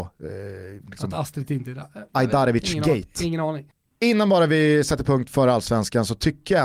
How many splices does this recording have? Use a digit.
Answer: 0